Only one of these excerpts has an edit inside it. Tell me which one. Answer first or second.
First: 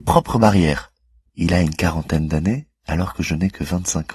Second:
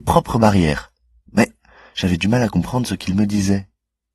first